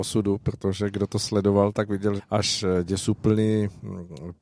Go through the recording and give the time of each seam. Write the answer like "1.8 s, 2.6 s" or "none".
2.2 s